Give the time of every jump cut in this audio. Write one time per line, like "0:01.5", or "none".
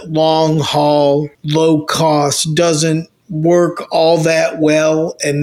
0:01.3